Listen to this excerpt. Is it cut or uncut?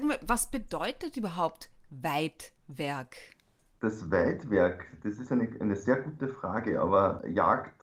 uncut